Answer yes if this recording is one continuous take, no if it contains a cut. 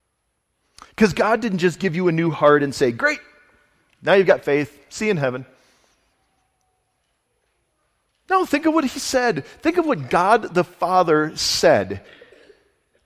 yes